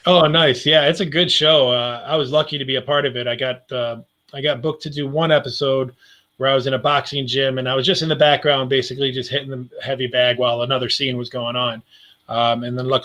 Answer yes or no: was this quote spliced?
no